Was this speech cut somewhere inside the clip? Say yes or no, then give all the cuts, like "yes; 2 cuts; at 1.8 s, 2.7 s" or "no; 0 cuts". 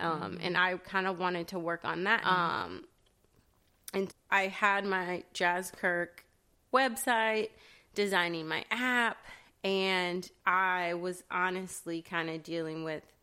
yes; 2 cuts; at 2.2 s, 4.1 s